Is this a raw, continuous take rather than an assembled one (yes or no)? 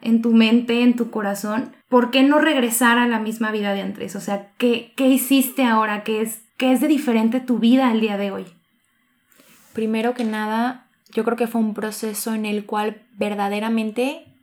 no